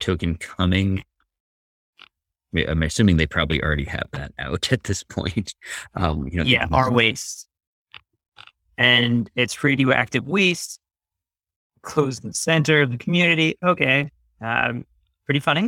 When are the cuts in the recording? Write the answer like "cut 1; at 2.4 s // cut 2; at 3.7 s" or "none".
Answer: none

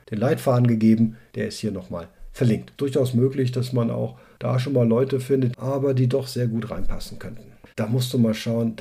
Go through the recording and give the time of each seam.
cut 1; at 2.8 s // cut 2; at 5.5 s // cut 3; at 7.7 s

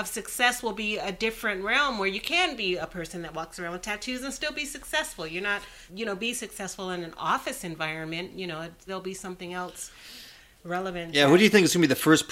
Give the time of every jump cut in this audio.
cut 1; at 5.9 s // cut 2; at 8.9 s

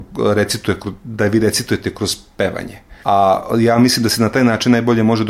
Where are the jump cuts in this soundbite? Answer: cut 1; at 3.0 s

